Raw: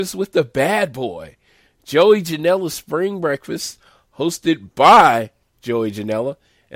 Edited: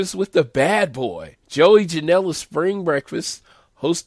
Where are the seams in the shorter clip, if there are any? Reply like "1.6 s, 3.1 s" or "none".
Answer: 1.4 s

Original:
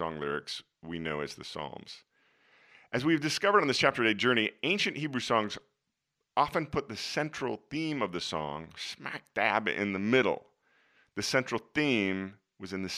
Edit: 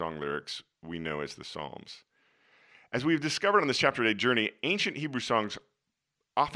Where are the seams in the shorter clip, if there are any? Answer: none

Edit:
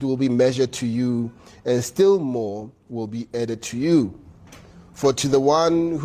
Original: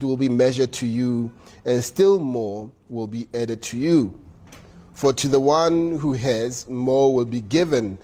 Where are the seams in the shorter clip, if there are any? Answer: none

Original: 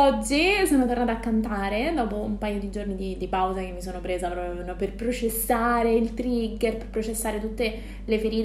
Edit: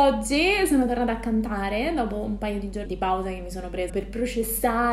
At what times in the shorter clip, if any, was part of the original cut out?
2.9 s, 3.9 s

